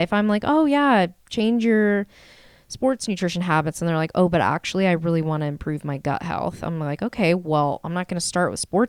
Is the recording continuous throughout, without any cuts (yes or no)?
yes